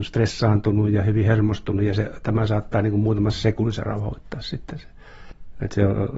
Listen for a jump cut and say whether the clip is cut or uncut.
uncut